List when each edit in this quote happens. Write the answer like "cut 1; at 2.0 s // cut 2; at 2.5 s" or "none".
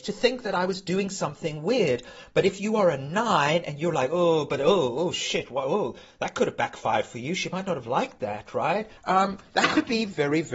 cut 1; at 9.0 s